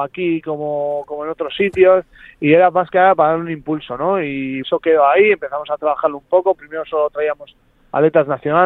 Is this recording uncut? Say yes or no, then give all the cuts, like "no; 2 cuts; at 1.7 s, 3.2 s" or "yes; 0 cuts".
no; 1 cut; at 4.6 s